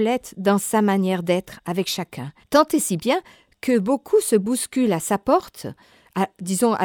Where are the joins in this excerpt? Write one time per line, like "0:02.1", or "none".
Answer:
0:02.4